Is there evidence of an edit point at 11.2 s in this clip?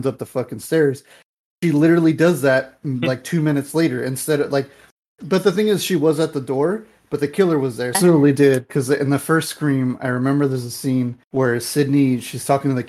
yes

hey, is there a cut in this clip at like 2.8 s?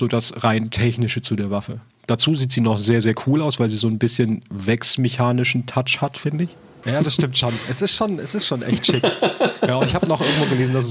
no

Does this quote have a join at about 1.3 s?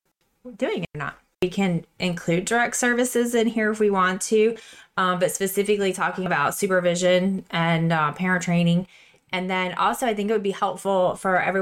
yes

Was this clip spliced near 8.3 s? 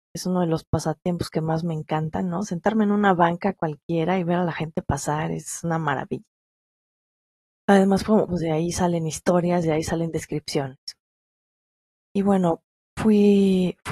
yes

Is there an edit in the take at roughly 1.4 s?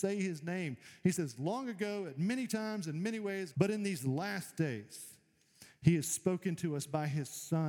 no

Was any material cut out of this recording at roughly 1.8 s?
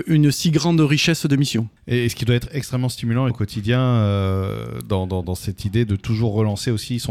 yes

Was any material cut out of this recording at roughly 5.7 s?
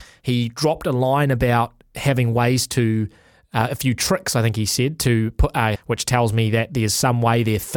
yes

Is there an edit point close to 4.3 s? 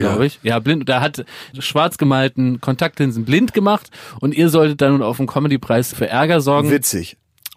no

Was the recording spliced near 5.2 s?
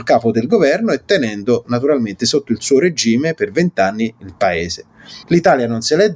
yes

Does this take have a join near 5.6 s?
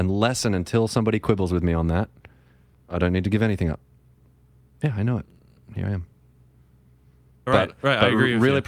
no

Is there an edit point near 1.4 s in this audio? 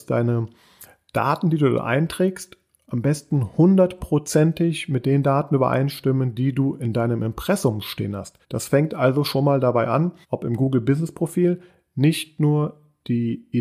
no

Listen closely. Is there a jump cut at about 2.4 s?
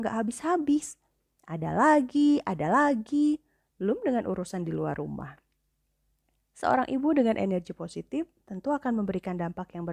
no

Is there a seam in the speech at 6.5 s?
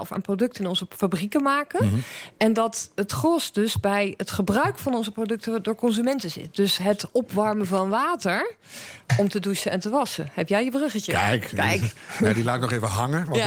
no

